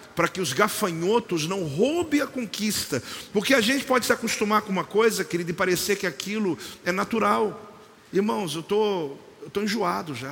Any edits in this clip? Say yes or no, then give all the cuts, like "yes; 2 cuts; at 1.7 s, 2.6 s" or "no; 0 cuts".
yes; 1 cut; at 8.1 s